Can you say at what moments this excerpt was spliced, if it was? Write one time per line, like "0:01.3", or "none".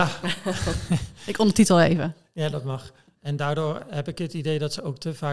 0:03.2